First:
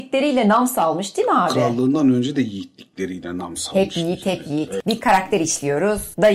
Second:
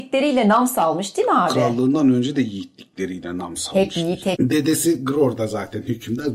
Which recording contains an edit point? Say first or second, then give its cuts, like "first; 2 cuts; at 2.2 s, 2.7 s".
second; 1 cut; at 4.3 s